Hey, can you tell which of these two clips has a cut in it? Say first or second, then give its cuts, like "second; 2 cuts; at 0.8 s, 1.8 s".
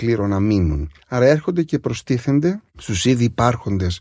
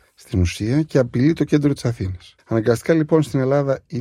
second; 1 cut; at 2.4 s